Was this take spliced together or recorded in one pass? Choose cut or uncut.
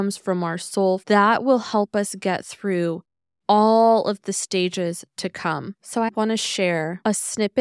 cut